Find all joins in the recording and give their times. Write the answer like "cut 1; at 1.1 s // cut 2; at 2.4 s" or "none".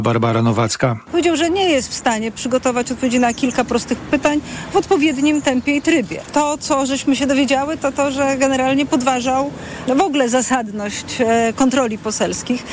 none